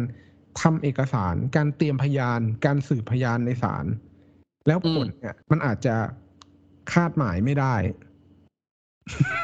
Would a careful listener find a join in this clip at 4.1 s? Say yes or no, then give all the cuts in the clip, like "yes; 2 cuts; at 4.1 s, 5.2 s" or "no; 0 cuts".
no; 1 cut; at 5.4 s